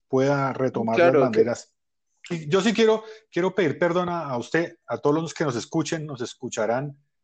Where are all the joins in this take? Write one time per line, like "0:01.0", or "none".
0:02.3